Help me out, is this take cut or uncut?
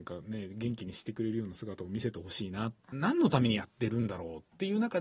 cut